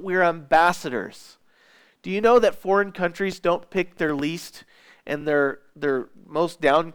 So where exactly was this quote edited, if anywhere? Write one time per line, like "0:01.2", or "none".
none